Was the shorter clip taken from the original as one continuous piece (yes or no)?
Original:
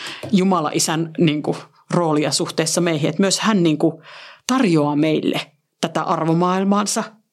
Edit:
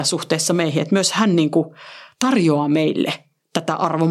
yes